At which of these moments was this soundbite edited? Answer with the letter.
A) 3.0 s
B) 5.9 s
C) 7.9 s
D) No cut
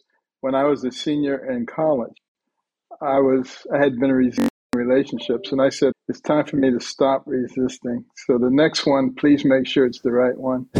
B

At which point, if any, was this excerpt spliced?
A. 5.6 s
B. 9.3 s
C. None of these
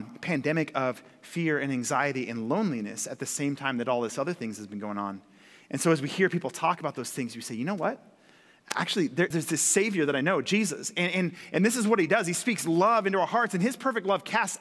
B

